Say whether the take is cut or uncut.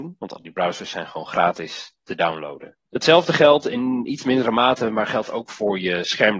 cut